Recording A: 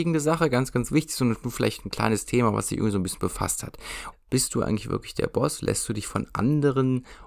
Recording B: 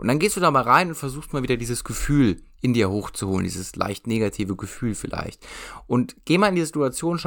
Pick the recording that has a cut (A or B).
A